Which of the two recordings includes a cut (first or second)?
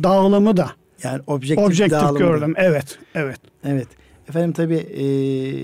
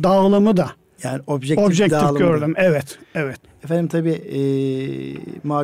second